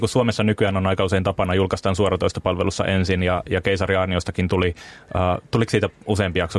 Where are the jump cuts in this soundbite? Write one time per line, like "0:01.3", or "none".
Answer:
none